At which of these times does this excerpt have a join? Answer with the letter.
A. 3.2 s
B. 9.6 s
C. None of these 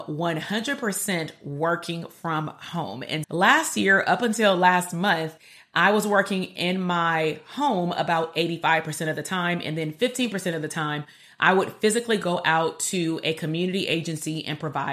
A